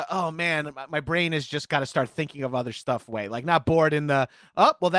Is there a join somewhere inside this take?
no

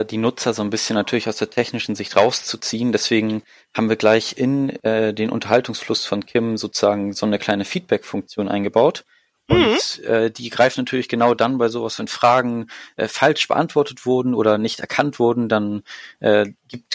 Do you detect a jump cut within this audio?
yes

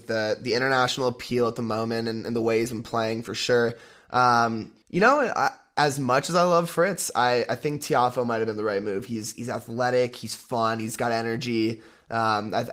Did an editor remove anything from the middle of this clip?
yes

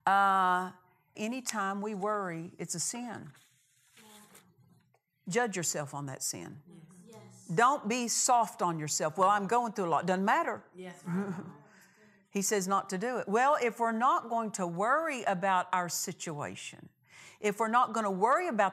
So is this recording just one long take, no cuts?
no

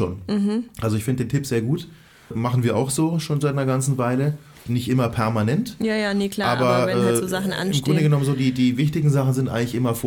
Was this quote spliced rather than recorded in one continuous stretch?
no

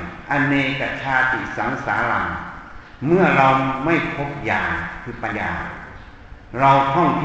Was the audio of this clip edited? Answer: yes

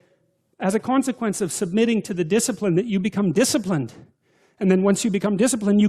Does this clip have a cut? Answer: no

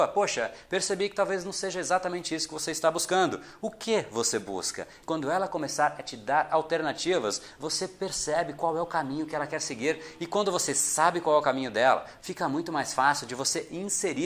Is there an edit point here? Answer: yes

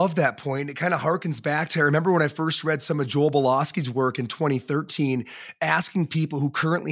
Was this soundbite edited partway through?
no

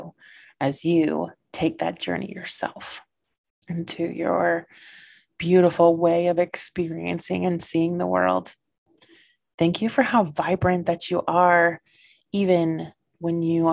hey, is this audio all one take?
no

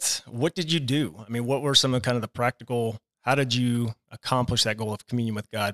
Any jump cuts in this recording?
no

